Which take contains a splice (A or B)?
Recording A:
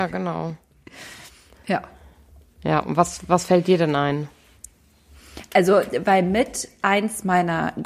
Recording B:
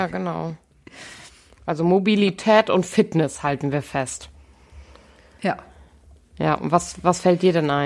A